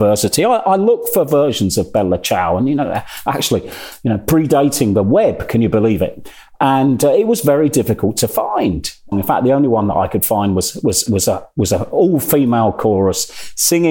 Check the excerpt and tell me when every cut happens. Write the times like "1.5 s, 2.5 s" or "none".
9.1 s, 11.1 s